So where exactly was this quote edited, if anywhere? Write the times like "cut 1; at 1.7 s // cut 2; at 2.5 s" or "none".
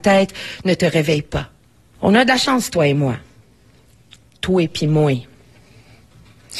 cut 1; at 1.9 s